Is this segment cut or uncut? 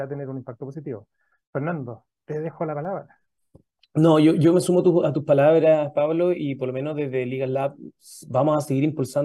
uncut